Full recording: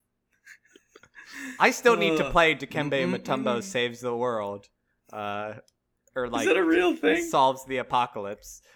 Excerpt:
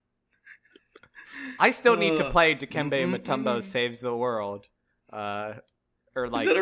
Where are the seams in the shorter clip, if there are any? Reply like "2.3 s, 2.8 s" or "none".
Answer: none